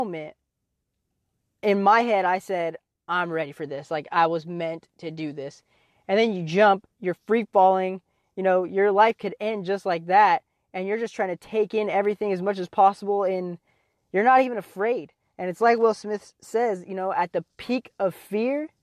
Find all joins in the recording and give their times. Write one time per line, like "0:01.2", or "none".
none

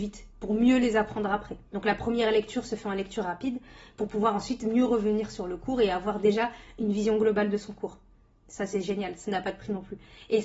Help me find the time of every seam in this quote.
0:01.7

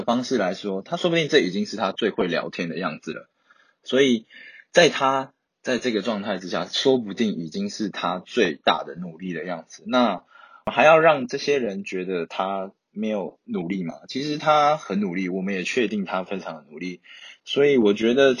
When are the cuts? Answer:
none

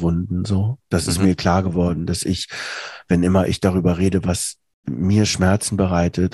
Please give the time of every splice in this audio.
none

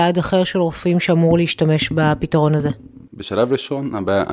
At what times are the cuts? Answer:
0:03.1

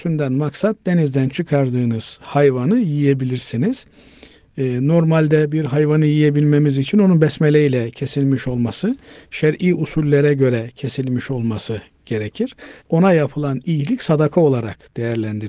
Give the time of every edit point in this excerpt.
0:12.8

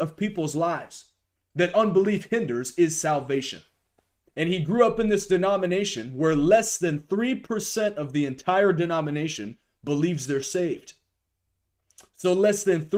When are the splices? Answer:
0:04.2

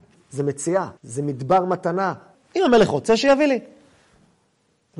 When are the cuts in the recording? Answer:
0:01.0
0:02.4

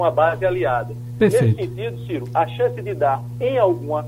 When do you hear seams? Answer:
none

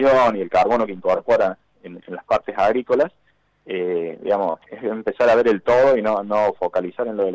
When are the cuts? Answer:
0:02.0
0:04.6

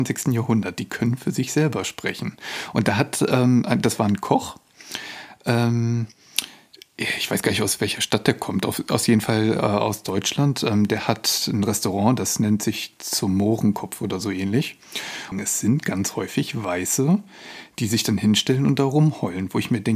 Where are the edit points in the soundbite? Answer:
0:15.3

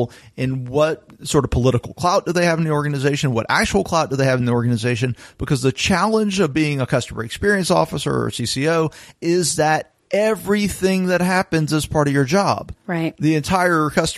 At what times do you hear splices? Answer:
none

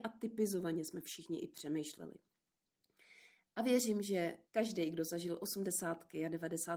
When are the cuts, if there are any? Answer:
0:04.5

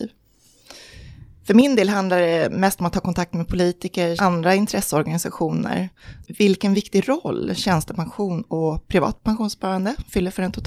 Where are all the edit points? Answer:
0:04.2
0:06.2

